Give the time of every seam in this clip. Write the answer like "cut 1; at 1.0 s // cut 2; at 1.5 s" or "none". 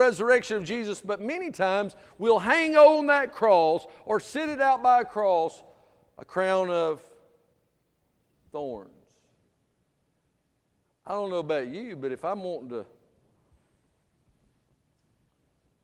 none